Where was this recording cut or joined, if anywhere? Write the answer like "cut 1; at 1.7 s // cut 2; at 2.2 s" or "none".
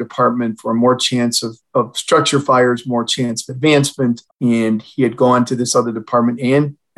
cut 1; at 4.3 s